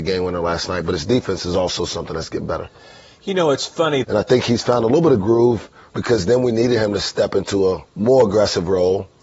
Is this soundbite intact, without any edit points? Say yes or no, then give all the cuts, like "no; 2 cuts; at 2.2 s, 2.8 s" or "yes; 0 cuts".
no; 3 cuts; at 4.0 s, 5.9 s, 7.9 s